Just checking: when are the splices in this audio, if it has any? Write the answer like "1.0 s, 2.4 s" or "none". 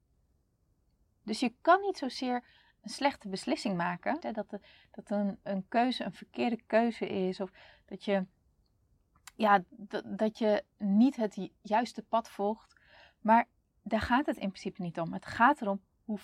4.2 s